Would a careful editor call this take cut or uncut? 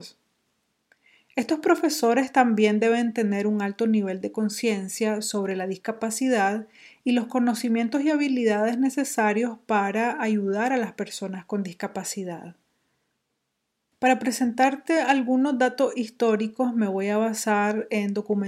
uncut